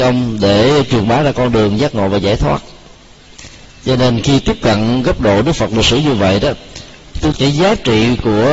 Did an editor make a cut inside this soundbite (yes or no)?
yes